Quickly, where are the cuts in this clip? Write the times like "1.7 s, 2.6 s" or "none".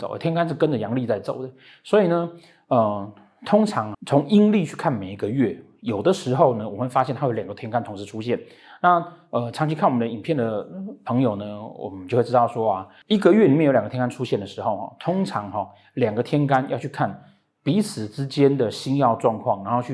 3.9 s